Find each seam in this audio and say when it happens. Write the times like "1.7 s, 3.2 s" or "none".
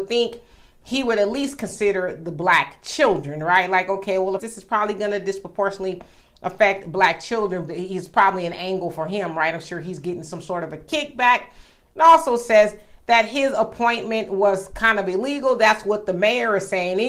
4.4 s, 7.7 s